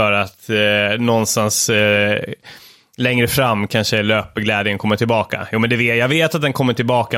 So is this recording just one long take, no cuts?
yes; 0 cuts

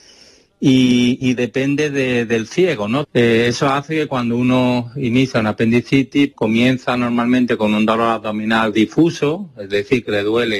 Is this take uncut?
no; 2 cuts; at 3.0 s, 6.3 s

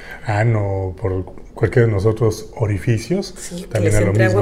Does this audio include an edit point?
no; 0 cuts

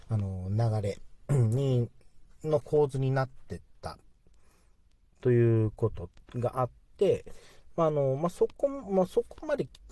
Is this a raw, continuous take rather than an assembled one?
yes; 0 cuts

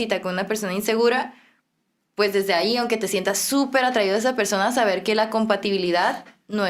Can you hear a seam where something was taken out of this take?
no; 0 cuts

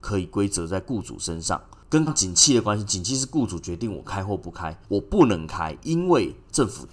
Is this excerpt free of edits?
no; 2 cuts; at 2.1 s, 4.8 s

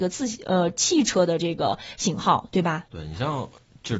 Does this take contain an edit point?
yes; 1 cut; at 2.9 s

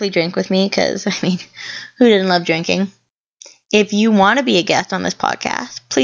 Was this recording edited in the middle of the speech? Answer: no; 0 cuts

